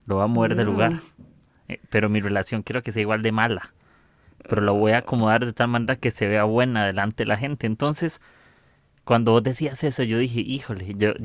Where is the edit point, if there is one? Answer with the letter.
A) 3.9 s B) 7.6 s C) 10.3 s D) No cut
D